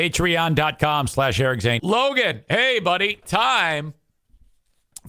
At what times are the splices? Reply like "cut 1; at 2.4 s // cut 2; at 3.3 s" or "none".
cut 1; at 1.8 s // cut 2; at 3.2 s

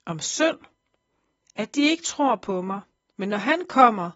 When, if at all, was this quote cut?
cut 1; at 3.1 s

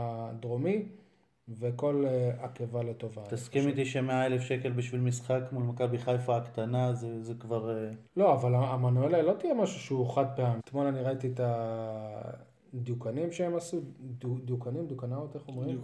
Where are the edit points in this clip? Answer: cut 1; at 8.1 s // cut 2; at 10.6 s

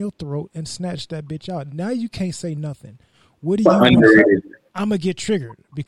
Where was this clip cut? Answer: cut 1; at 4.7 s

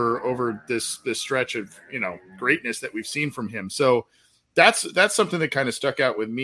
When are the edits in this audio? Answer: none

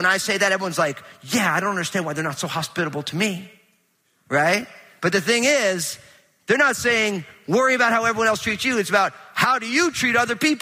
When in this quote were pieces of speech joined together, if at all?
none

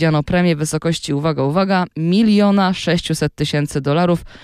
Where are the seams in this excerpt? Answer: none

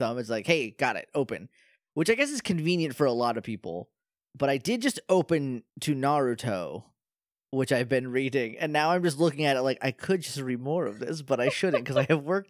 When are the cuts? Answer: cut 1; at 5.7 s

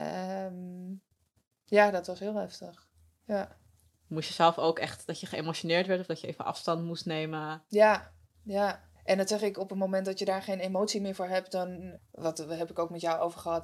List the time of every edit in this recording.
cut 1; at 12.0 s

